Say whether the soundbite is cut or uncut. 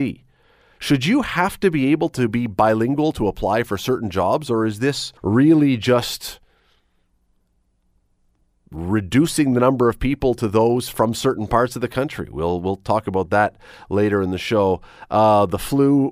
cut